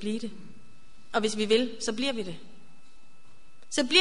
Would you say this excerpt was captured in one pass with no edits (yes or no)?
yes